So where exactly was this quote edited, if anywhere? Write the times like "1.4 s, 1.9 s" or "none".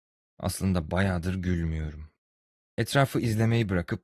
2.6 s